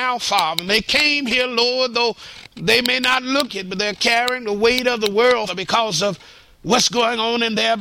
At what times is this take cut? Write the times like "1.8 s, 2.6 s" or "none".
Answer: 3.5 s, 5.5 s